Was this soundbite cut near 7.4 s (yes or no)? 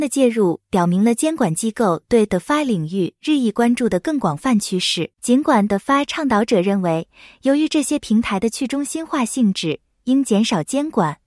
no